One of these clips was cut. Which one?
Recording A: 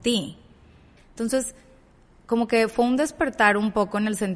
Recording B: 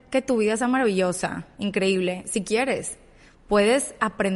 A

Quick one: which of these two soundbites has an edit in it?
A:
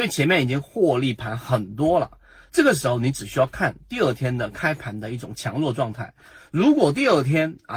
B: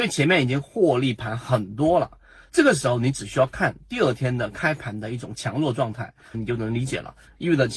B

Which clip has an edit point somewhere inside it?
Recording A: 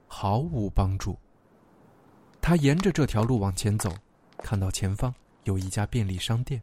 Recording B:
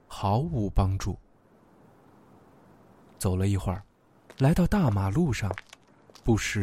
A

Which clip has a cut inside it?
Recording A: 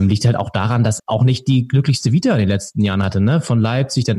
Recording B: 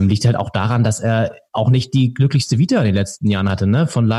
A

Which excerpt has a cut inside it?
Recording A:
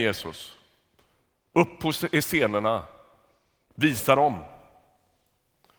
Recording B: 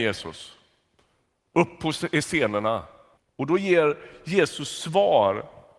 B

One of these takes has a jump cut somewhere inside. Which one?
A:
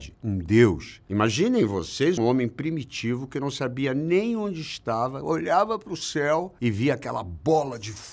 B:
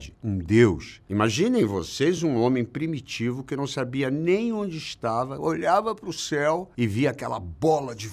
A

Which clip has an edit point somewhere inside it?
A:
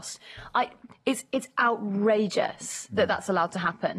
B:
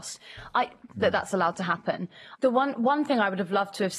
B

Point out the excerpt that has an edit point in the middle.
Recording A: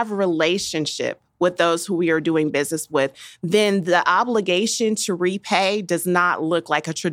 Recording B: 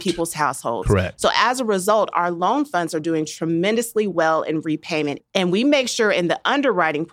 B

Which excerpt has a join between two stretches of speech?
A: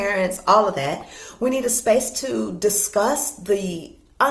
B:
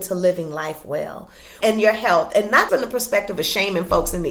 B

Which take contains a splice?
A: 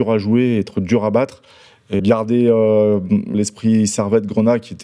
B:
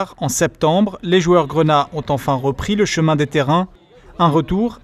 A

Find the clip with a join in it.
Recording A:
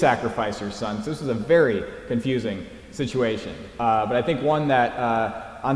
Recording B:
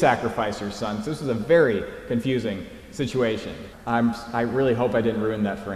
B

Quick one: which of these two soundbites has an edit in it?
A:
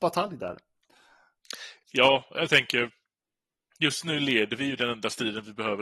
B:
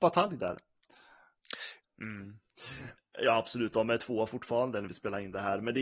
B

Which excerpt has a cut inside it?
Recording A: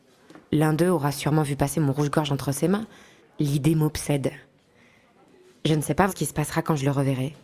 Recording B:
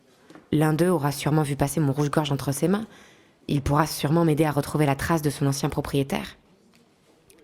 A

